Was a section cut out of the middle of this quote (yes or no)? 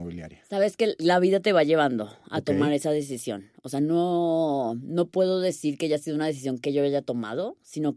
no